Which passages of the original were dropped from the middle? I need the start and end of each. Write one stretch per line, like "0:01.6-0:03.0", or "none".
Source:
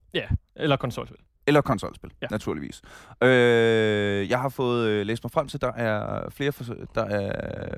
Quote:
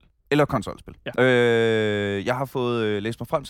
0:02.3-0:03.2